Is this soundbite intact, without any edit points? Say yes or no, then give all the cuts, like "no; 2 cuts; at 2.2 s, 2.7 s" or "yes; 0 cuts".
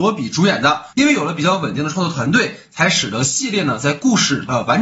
no; 1 cut; at 0.9 s